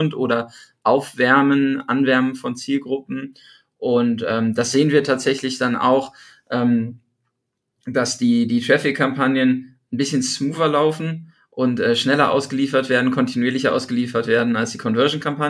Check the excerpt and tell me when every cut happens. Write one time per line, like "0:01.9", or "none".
none